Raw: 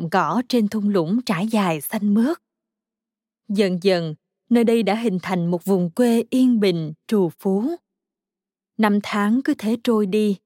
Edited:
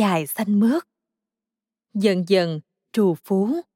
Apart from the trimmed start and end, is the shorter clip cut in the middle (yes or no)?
yes